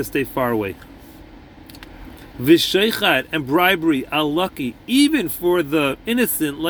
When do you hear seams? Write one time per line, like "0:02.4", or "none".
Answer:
none